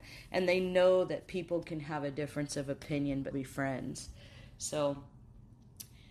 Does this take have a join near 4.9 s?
no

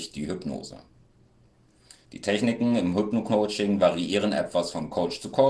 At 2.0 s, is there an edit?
yes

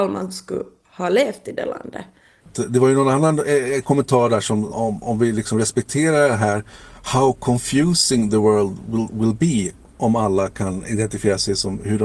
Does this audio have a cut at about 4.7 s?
yes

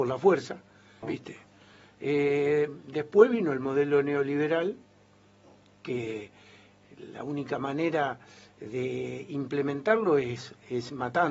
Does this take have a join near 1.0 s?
yes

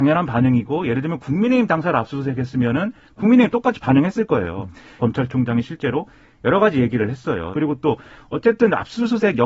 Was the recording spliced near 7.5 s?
yes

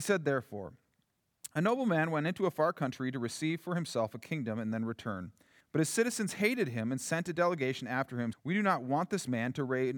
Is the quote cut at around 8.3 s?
yes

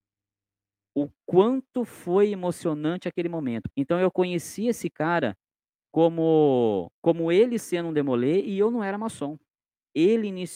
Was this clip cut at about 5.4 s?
no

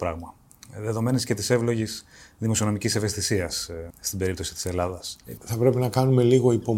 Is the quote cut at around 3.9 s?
yes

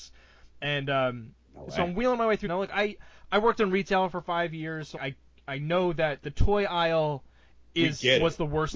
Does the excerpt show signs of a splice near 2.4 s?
yes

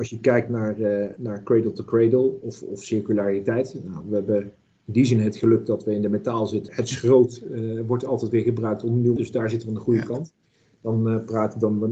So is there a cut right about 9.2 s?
yes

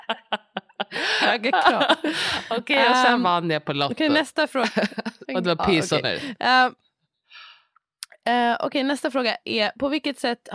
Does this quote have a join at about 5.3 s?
yes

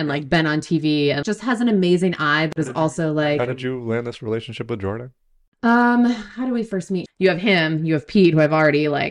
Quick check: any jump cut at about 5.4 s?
no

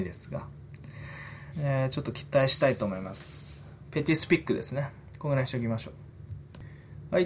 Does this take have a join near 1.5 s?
yes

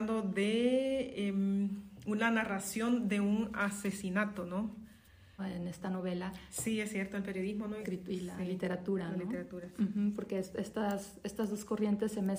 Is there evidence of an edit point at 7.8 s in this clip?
yes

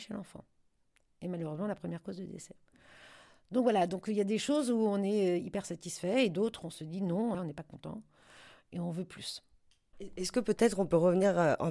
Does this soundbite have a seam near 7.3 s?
yes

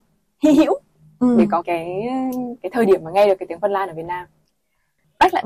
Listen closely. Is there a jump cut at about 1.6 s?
yes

